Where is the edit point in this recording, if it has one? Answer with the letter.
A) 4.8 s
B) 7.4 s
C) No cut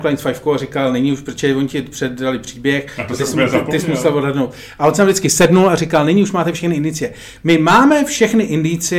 C